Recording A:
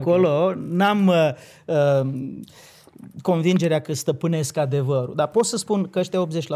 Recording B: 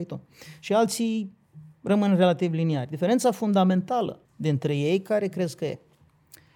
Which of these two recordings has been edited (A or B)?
B